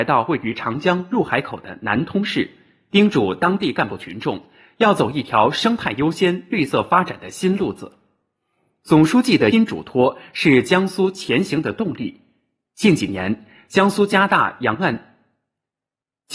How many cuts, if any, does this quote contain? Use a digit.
1